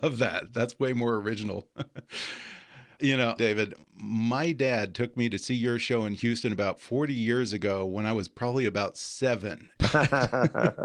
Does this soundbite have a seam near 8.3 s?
no; 2 cuts; at 3.4 s, 9.7 s

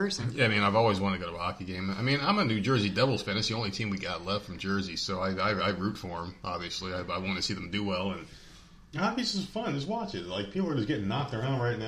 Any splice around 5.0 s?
no; 0 cuts

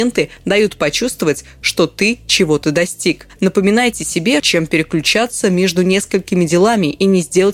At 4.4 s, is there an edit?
yes; 1 cut; at 4.4 s

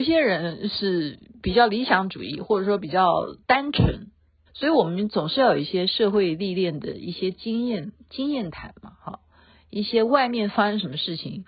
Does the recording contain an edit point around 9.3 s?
no; 1 cut; at 4.5 s

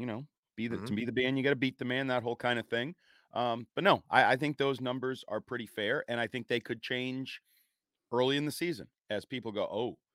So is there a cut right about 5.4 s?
no; 0 cuts

